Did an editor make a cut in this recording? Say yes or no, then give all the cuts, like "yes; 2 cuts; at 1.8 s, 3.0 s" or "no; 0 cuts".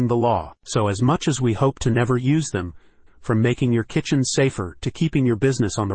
yes; 1 cut; at 3.1 s